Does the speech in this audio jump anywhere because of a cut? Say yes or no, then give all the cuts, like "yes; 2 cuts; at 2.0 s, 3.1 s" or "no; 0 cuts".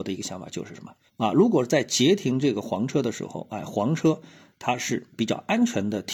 yes; 1 cut; at 1.1 s